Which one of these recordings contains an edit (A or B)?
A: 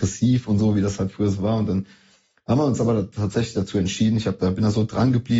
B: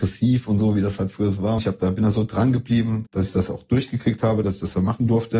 B